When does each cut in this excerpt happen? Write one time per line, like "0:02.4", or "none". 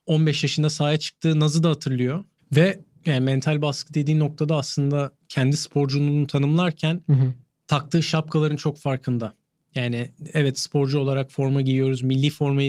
0:02.4